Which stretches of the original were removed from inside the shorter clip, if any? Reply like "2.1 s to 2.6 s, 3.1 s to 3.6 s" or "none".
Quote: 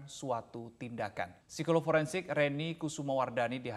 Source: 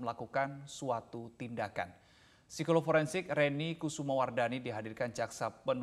2.0 s to 2.4 s